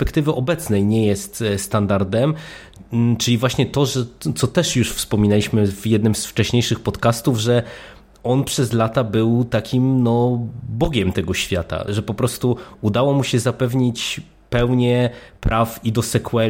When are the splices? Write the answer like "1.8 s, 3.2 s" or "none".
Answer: 11.9 s